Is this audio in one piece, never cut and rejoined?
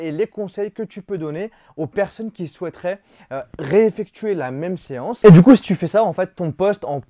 yes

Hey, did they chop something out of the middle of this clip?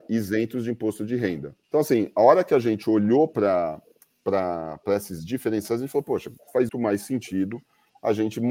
yes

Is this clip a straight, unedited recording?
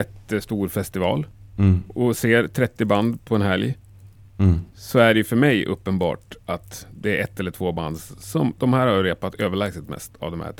yes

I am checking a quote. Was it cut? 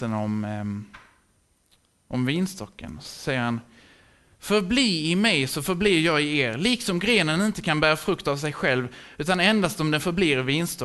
no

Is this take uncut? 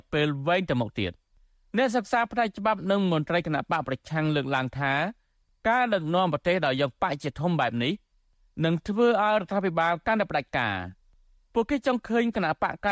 yes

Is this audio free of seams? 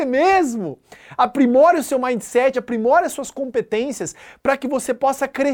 no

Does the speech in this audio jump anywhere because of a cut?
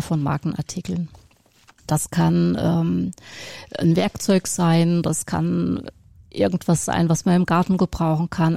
no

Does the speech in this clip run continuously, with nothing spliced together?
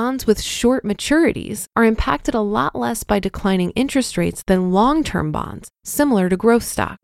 no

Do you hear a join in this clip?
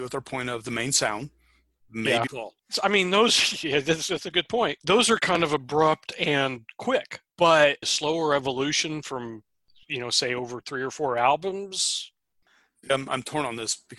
yes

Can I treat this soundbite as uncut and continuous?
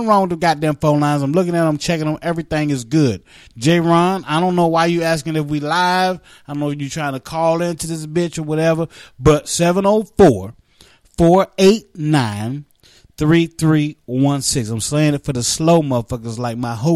yes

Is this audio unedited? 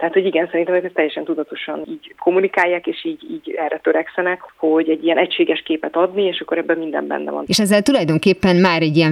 no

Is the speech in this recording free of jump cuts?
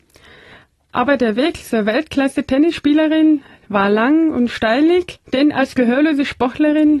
no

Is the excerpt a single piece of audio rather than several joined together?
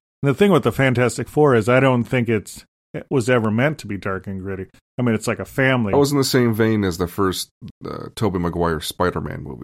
no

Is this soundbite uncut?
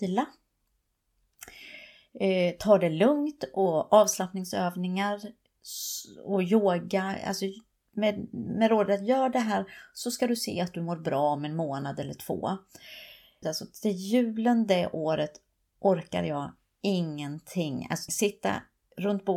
no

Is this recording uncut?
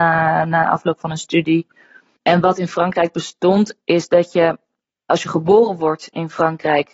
yes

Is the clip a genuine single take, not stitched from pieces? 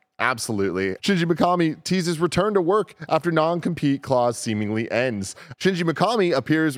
no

